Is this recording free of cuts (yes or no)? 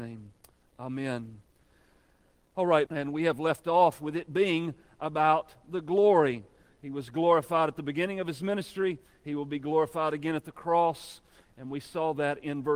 no